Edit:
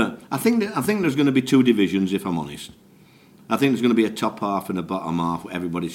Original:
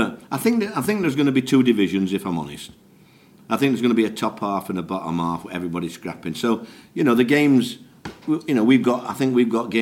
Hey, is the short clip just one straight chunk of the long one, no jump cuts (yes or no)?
yes